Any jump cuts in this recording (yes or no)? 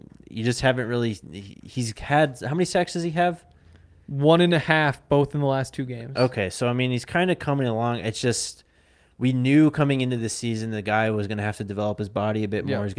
no